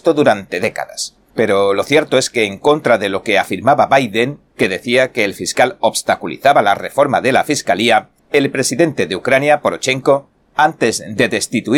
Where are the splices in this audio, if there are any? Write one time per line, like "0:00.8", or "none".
0:01.3
0:08.2